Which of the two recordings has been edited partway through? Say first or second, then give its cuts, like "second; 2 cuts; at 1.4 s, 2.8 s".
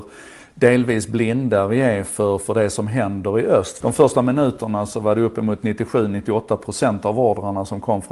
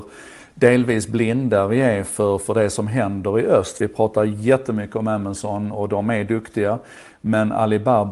first; 1 cut; at 3.8 s